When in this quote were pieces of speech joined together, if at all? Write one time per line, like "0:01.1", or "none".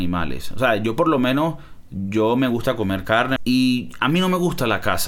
0:03.4